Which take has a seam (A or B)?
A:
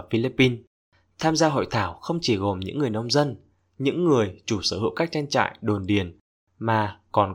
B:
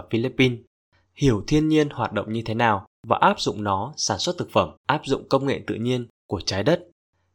B